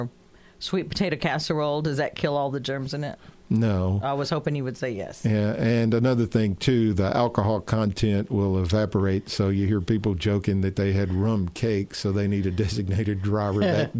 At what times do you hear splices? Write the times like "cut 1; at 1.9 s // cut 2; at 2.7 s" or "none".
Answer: none